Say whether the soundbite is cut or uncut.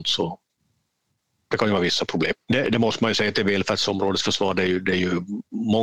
cut